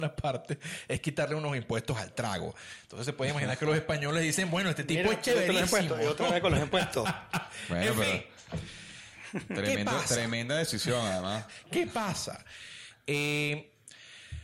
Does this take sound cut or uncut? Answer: uncut